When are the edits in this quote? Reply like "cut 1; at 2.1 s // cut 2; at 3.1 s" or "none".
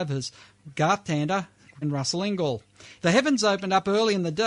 cut 1; at 1.8 s // cut 2; at 3.0 s